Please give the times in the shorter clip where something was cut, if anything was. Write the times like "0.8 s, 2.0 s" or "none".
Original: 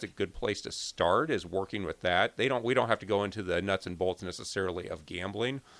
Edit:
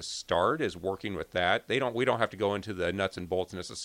none